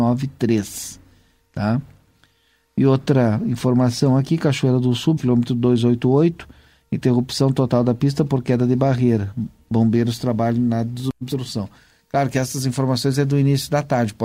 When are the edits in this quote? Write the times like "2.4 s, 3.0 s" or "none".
5.2 s